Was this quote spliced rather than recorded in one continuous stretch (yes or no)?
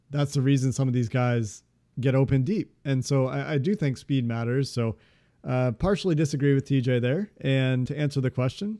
yes